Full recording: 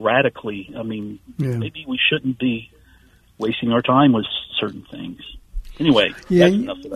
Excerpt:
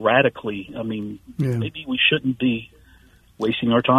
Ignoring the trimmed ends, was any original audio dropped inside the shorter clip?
no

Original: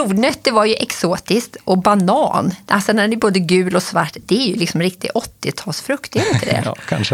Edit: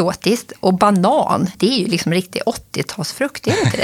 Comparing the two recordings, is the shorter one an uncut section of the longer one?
no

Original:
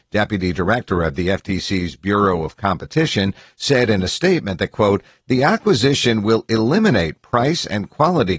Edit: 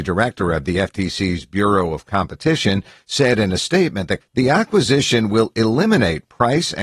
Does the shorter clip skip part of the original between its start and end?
yes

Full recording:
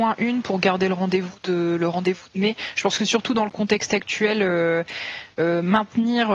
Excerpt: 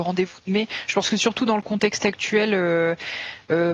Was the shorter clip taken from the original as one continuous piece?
yes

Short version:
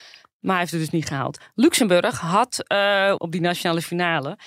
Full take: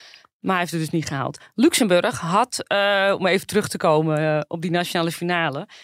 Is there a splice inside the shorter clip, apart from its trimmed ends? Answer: yes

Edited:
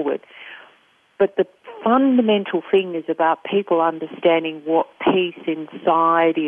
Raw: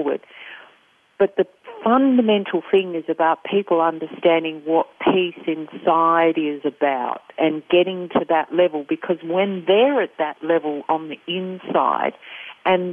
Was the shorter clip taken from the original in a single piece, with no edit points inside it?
yes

